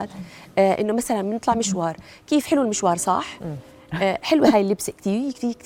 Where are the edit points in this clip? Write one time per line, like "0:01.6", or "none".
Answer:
none